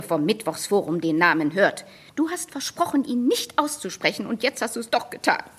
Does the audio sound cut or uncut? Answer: uncut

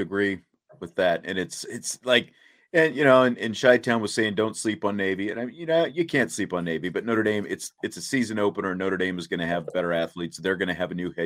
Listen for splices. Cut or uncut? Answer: uncut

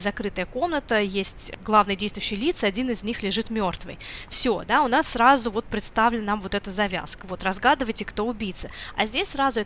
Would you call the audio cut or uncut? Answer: uncut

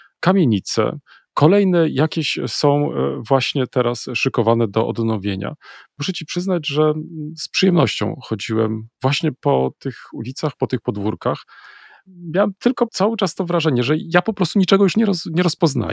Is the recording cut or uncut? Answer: uncut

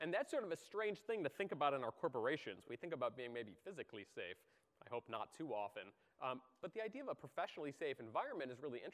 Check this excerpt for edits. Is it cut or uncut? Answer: uncut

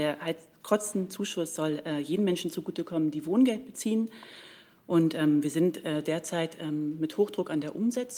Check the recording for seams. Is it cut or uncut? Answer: uncut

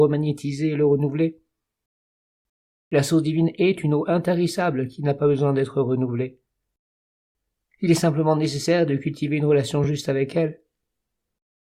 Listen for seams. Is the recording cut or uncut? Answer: uncut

